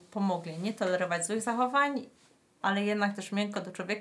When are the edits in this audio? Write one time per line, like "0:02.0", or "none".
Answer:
0:02.6